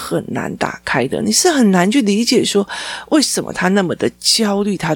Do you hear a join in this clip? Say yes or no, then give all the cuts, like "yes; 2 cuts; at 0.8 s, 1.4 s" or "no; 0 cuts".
no; 0 cuts